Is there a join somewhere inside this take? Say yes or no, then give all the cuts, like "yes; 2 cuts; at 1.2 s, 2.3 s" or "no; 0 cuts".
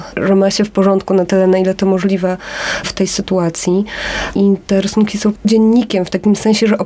no; 0 cuts